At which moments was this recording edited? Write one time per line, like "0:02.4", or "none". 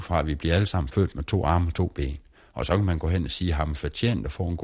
none